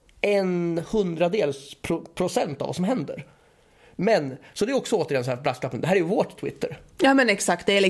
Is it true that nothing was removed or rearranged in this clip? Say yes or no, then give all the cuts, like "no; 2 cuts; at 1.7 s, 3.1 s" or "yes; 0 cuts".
yes; 0 cuts